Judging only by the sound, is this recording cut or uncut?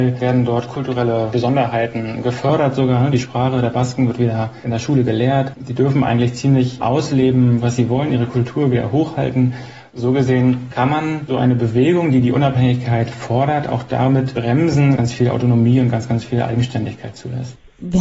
cut